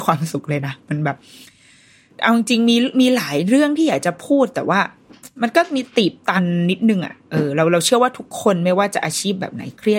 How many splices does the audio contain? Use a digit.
0